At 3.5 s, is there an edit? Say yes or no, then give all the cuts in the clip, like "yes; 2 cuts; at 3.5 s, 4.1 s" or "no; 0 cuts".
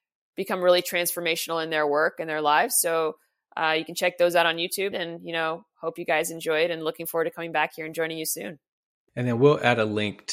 no; 1 cut; at 4.9 s